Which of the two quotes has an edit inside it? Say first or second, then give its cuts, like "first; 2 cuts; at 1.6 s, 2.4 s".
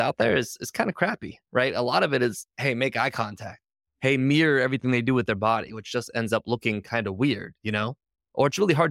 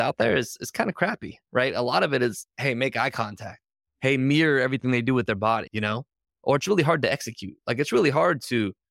second; 1 cut; at 5.7 s